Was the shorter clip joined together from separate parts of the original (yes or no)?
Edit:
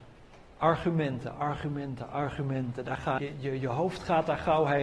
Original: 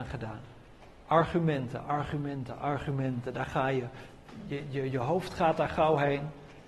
yes